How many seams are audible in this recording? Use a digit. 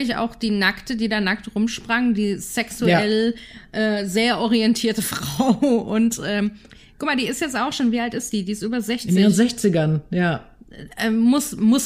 0